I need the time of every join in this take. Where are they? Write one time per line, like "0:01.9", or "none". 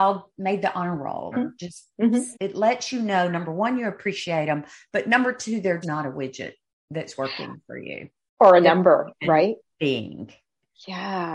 0:01.3
0:02.3
0:05.8